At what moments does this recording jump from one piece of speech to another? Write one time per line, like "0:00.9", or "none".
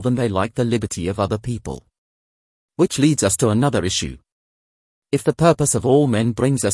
none